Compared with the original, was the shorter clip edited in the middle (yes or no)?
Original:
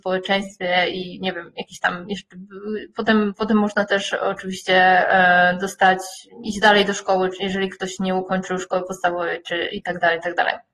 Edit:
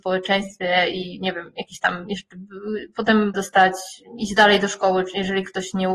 yes